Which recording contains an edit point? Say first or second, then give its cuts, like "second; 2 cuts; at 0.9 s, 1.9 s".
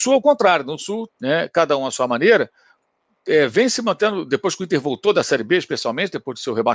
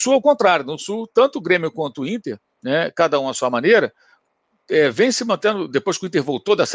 first; 1 cut; at 1.1 s